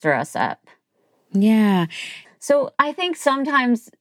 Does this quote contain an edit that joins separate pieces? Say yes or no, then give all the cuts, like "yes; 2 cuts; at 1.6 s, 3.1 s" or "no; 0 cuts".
yes; 1 cut; at 2.3 s